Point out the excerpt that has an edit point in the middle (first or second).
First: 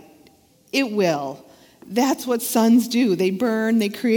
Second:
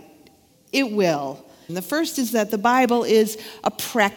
second